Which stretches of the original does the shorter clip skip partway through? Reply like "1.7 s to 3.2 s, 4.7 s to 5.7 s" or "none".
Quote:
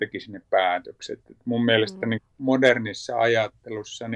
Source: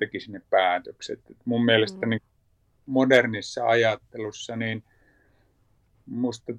2.3 s to 2.8 s